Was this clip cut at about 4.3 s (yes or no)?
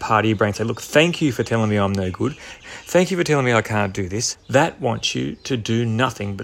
yes